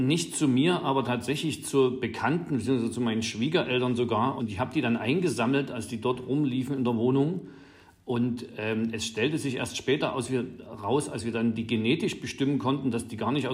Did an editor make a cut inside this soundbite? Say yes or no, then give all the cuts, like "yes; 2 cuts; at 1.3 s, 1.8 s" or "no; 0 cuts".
no; 0 cuts